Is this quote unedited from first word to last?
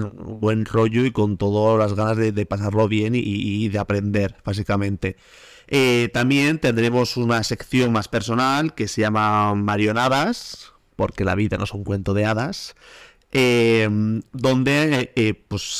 yes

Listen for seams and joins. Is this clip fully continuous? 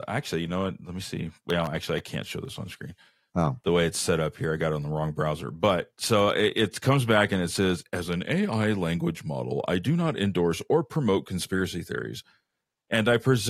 yes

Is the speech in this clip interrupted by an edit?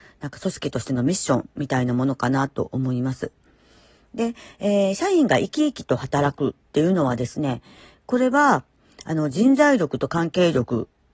no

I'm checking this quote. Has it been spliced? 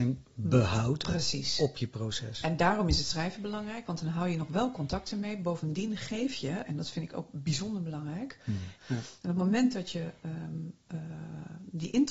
yes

